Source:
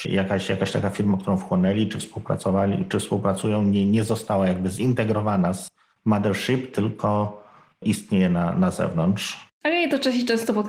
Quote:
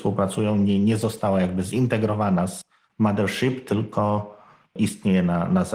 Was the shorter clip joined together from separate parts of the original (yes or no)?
no